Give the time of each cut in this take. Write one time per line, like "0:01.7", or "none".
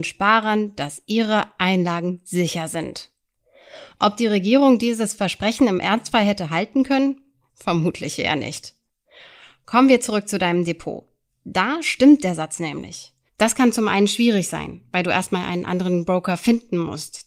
0:13.3